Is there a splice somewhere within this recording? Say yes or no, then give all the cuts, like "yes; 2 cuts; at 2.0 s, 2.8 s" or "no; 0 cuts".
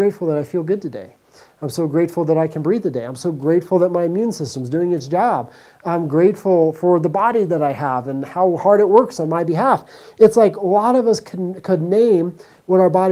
no; 0 cuts